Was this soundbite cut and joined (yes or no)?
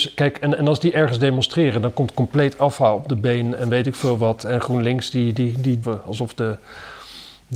yes